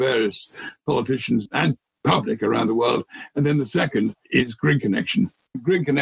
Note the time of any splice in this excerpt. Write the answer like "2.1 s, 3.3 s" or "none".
none